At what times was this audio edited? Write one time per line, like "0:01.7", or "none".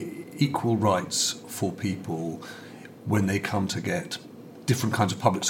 none